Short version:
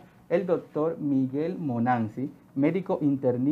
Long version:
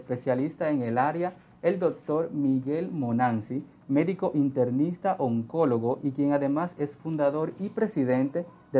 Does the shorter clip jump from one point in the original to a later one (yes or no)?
no